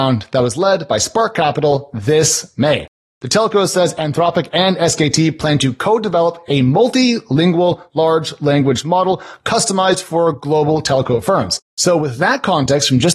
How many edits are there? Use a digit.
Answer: 1